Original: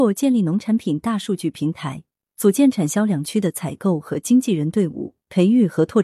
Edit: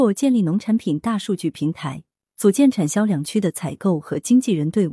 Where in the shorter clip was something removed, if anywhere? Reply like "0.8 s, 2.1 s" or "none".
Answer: none